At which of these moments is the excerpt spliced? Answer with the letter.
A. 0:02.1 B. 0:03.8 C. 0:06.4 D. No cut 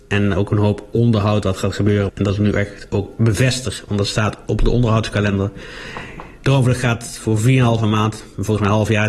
A